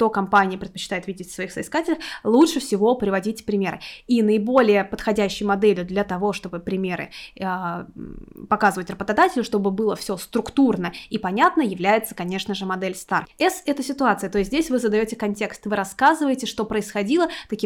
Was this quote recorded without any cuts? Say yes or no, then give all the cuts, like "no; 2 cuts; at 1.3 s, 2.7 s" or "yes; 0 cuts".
no; 1 cut; at 13.3 s